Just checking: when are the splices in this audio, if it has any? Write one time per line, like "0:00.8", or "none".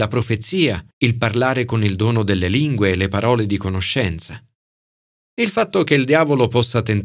0:00.9